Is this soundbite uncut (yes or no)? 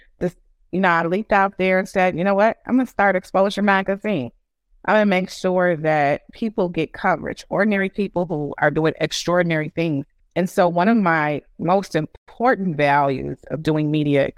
yes